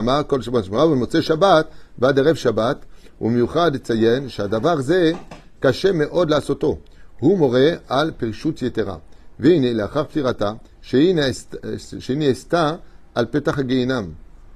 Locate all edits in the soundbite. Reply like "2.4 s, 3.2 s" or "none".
10.7 s